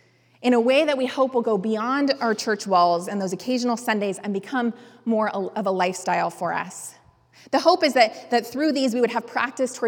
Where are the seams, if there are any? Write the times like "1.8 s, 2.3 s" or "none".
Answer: none